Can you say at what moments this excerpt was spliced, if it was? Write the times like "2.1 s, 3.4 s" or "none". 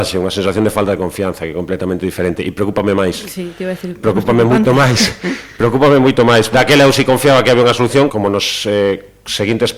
6.5 s, 8.1 s